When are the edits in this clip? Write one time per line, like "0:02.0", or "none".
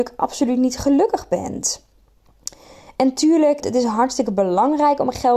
0:03.6